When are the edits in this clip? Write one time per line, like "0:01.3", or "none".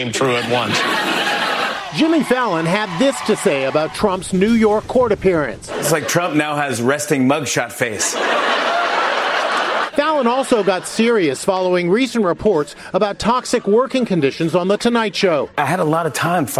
none